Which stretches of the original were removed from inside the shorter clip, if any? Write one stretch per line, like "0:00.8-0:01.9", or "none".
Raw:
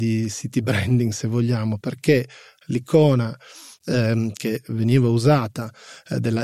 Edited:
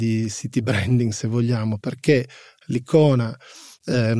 none